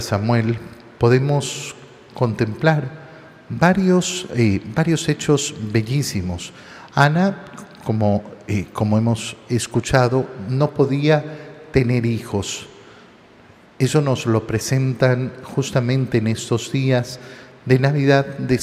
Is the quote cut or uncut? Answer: uncut